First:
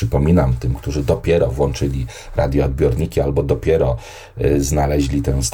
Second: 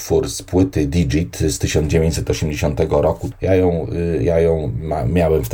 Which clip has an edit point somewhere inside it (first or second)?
second